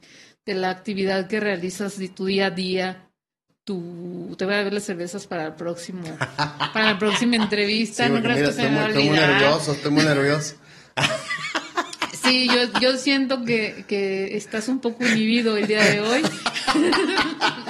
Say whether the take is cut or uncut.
uncut